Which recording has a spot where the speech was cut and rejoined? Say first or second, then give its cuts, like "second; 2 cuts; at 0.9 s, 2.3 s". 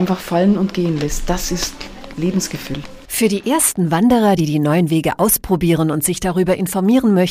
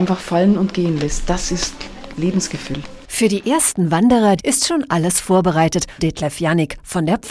second; 2 cuts; at 4.4 s, 6.0 s